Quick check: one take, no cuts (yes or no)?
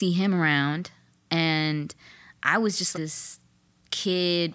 no